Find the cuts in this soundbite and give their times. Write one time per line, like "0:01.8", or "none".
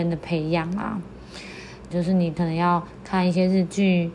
0:01.9

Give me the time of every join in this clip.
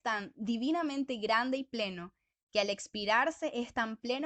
none

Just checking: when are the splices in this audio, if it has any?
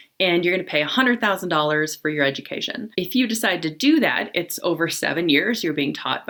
0:02.9

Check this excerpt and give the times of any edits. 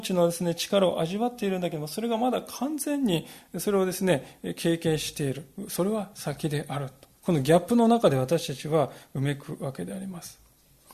0:07.2

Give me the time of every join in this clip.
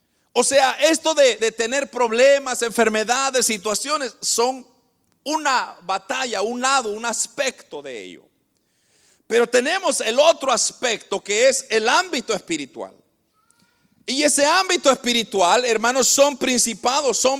0:01.4

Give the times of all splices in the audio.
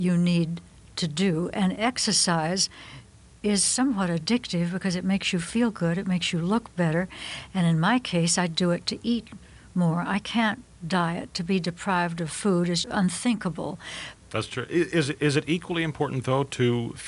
0:12.8
0:14.1

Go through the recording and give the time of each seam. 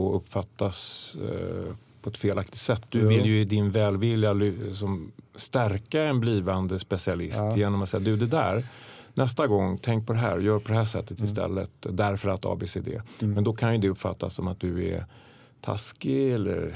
none

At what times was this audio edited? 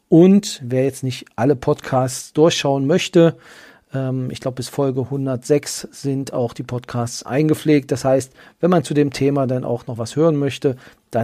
none

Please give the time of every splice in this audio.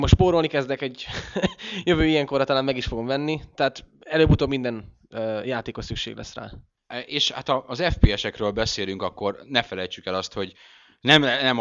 none

